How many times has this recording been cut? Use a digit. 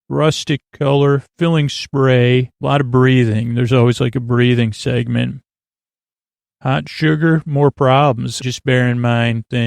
2